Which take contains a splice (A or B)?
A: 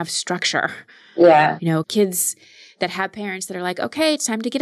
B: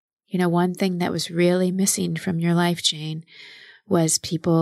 A